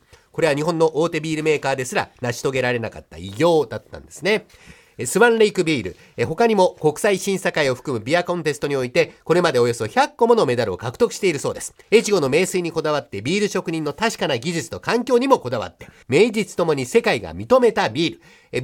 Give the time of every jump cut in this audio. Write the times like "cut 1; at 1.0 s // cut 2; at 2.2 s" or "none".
cut 1; at 11.8 s // cut 2; at 16.0 s